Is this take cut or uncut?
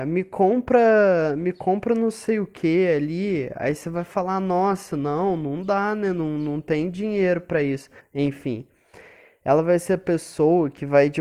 cut